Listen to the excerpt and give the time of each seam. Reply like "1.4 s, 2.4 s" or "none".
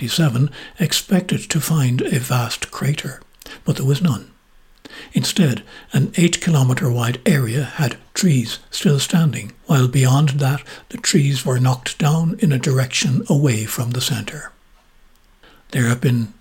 9.6 s